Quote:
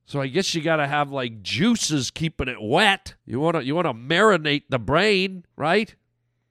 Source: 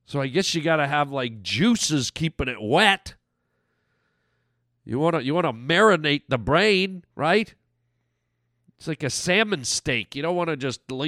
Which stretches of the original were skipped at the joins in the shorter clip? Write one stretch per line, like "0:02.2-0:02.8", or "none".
0:03.2-0:04.8

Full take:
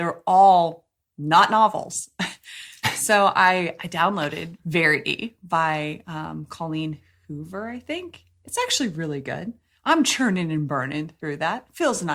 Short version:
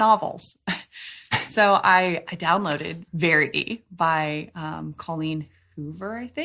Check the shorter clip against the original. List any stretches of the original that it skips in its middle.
none

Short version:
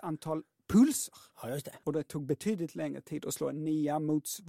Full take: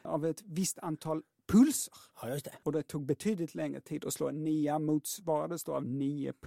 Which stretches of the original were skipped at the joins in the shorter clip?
none

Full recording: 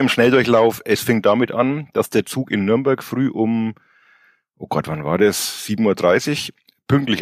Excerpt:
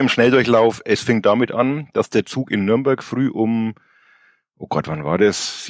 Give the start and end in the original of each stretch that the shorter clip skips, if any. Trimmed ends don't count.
none

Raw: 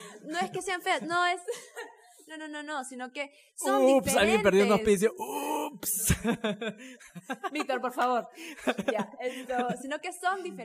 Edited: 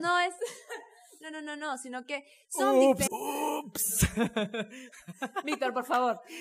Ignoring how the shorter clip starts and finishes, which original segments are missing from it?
0:04.1-0:05.1

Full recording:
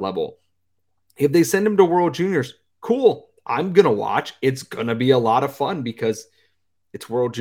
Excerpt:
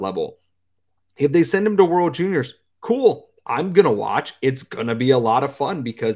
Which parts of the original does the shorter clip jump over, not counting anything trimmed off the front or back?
none

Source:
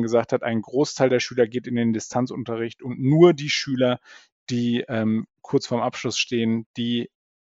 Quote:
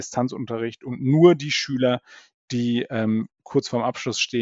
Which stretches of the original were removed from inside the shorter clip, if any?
none

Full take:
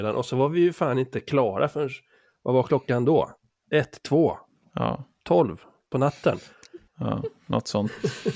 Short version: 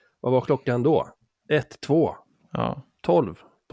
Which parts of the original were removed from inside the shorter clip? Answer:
none

